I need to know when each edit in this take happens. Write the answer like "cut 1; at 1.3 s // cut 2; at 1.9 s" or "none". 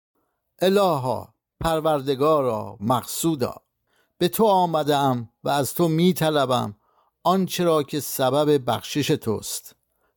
cut 1; at 2.8 s